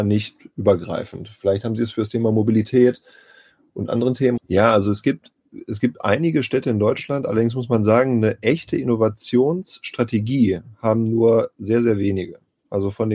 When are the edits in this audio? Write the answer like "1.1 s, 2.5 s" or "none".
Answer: 4.4 s